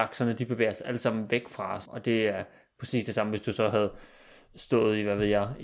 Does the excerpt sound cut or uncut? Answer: cut